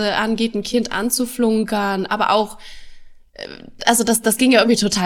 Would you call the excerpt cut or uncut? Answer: uncut